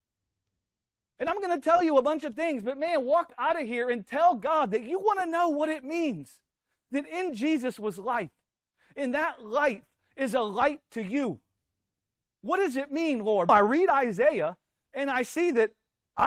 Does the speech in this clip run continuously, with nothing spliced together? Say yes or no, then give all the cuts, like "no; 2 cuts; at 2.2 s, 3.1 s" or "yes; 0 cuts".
no; 1 cut; at 13.5 s